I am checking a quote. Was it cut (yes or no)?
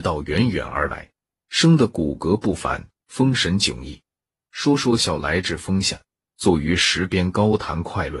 yes